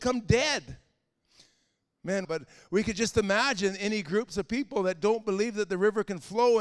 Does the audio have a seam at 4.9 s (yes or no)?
no